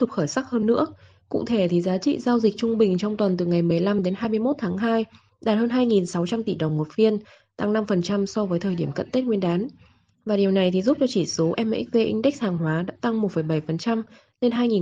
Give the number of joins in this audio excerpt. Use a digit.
0